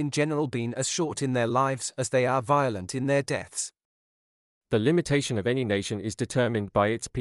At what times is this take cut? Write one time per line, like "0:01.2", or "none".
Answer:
0:04.5